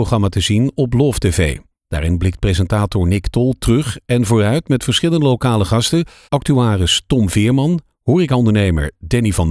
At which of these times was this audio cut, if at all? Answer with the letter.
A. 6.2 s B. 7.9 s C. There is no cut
A